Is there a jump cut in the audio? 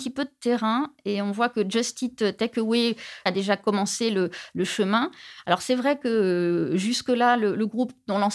yes; 1 cut; at 3.3 s

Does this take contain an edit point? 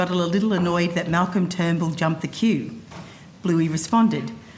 no; 0 cuts

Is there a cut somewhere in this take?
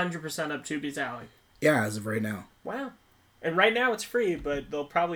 yes; 1 cut; at 1.5 s

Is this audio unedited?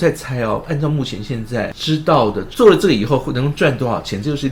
no; 1 cut; at 2.5 s

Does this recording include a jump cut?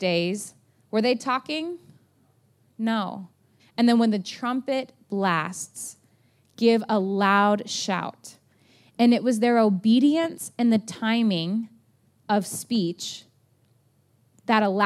yes; 1 cut; at 3.6 s

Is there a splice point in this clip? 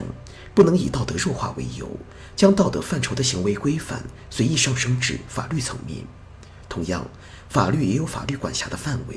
no; 0 cuts

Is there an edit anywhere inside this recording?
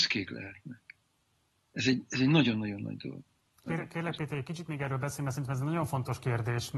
yes; 1 cut; at 3.7 s

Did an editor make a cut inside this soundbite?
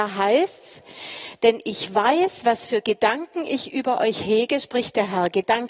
no; 0 cuts

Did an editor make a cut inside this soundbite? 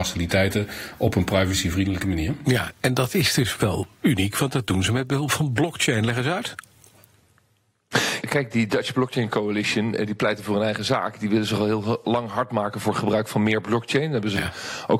yes; 1 cut; at 8.2 s

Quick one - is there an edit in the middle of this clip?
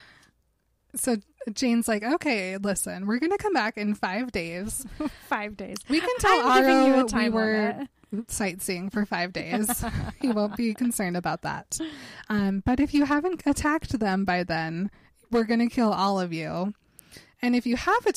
no; 0 cuts

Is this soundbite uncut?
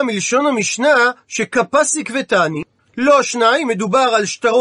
no; 1 cut; at 2.8 s

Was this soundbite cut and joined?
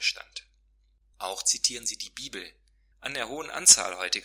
yes; 2 cuts; at 1.0 s, 2.9 s

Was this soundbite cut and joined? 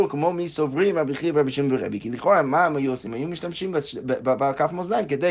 no; 0 cuts

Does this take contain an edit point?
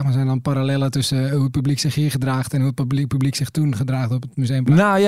no; 0 cuts

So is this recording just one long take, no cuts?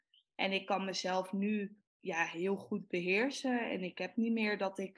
no; 1 cut; at 1.9 s

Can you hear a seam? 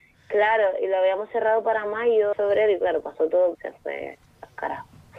yes; 2 cuts; at 2.3 s, 3.5 s

